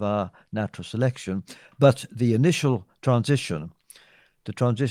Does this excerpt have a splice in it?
no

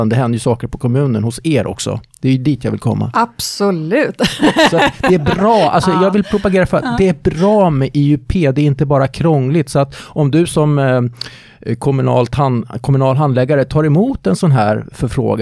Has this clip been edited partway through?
no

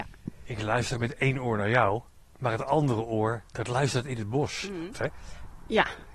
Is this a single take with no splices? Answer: no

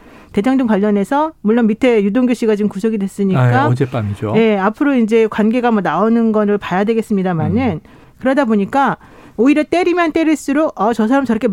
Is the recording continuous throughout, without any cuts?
no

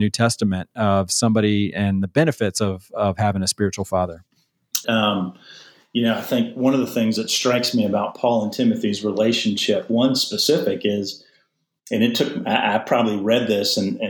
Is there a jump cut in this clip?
yes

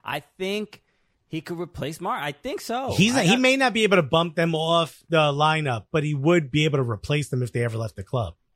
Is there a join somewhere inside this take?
no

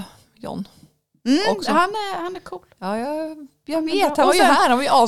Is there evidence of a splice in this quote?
no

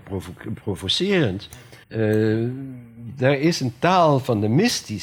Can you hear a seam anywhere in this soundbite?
yes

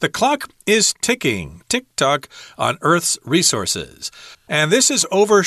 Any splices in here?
yes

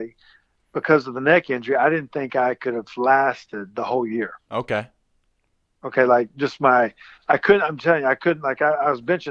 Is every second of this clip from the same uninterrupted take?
yes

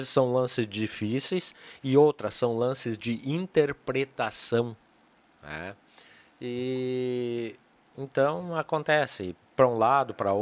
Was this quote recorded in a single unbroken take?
yes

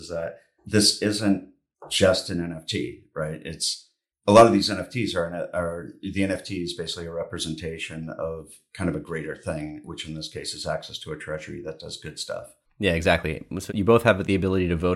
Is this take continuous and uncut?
yes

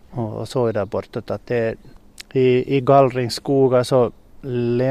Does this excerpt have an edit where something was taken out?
no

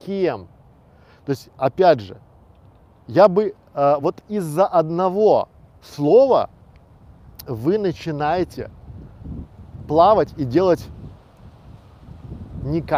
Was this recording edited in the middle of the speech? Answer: no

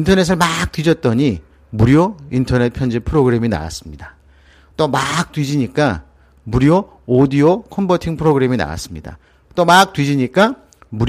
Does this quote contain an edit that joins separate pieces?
no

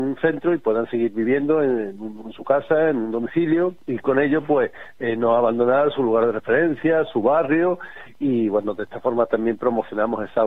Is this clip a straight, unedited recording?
no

